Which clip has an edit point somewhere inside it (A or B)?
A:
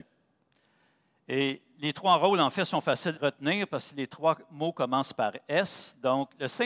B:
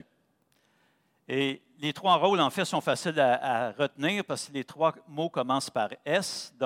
A